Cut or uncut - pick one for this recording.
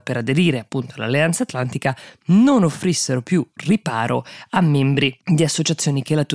uncut